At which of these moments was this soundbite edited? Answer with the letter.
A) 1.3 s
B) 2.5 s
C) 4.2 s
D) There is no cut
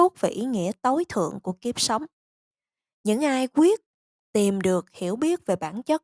D